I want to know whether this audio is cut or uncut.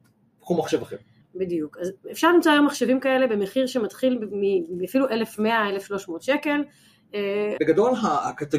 cut